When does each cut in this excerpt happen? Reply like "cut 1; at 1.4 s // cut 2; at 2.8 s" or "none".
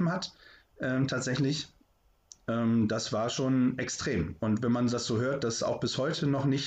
none